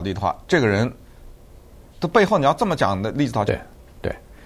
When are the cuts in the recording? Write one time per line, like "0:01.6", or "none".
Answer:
0:01.9
0:03.5